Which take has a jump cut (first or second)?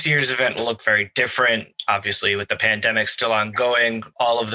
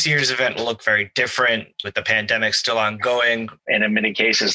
second